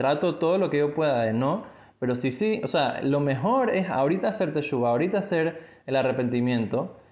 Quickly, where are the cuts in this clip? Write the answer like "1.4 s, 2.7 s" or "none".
none